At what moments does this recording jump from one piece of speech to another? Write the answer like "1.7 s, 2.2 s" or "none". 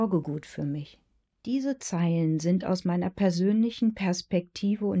1.3 s